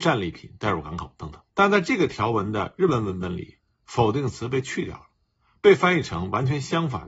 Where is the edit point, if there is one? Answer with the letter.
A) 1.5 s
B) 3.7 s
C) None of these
A